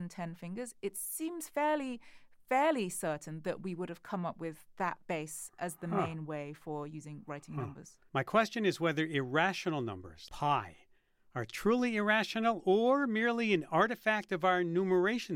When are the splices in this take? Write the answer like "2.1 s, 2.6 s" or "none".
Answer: 8.1 s, 10.3 s